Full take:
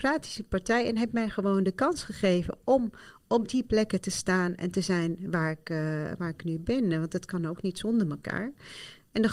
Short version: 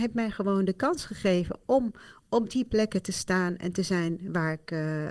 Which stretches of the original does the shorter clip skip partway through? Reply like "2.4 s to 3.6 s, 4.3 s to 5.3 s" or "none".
none

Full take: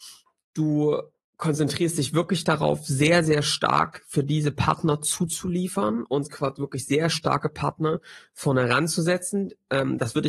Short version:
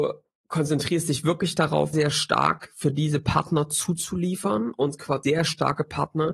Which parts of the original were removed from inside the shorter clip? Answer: 2.8 s to 3.3 s, 6.6 s to 6.9 s

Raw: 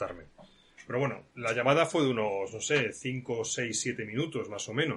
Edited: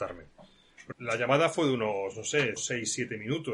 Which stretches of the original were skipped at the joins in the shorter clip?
0.9 s to 1.3 s, 2.9 s to 3.4 s

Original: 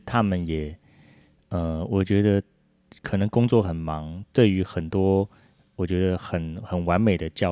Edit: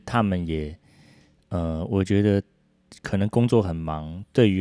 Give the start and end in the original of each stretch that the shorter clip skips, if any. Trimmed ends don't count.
none

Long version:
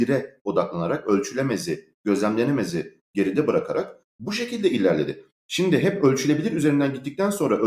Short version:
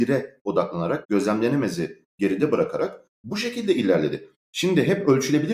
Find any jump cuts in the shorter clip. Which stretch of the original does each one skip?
1.0 s to 2.0 s

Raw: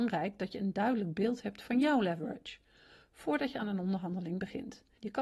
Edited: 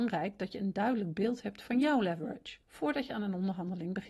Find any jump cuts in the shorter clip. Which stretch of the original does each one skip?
2.6 s to 3.1 s

